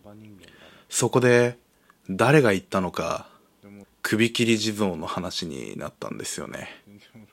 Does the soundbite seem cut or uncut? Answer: cut